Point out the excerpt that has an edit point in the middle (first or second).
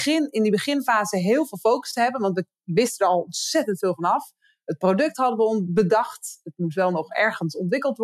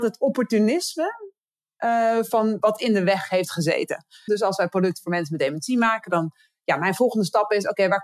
second